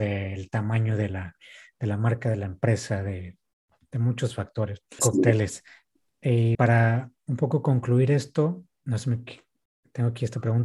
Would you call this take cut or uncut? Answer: cut